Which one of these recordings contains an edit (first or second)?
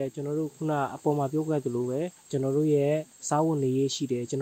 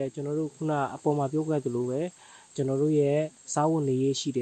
first